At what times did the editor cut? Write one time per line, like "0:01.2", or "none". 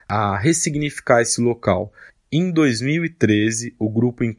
0:02.1